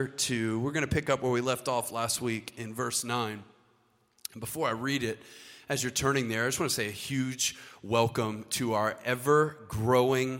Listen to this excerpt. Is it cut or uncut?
uncut